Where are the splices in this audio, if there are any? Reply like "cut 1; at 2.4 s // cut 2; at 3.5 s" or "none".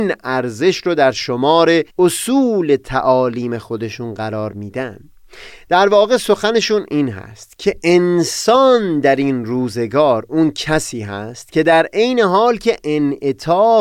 cut 1; at 1.9 s